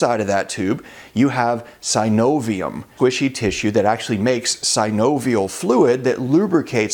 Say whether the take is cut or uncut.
cut